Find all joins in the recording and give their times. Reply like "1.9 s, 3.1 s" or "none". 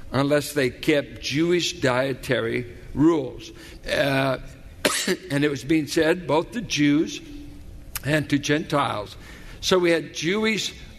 3.8 s